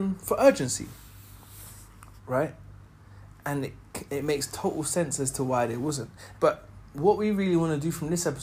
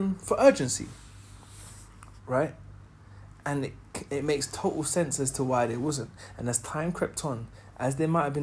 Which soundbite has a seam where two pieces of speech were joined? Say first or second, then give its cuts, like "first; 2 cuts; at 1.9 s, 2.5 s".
first; 1 cut; at 6.3 s